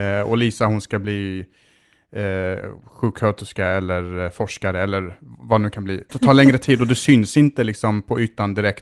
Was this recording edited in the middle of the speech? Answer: yes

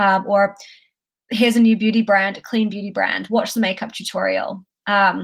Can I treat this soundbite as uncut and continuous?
yes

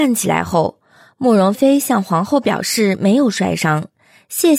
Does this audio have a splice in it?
yes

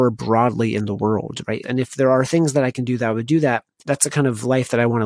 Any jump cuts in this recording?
yes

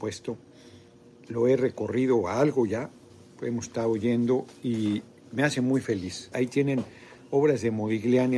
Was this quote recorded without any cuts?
no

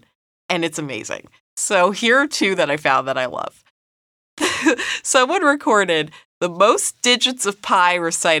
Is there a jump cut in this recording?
no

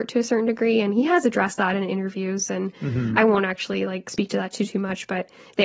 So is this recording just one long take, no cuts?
yes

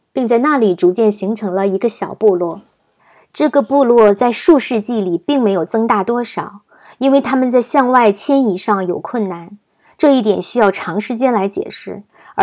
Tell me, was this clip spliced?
no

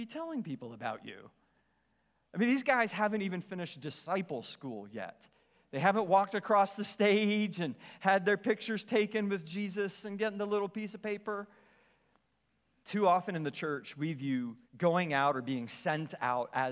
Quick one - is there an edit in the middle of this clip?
yes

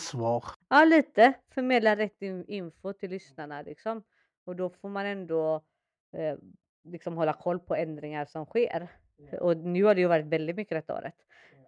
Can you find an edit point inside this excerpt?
no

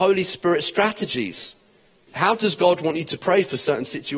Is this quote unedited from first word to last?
yes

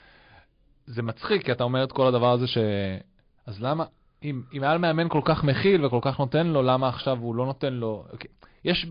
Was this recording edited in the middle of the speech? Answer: no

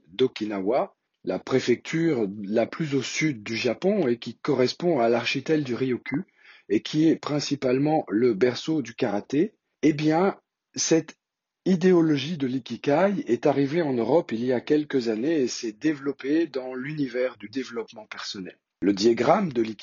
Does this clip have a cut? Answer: no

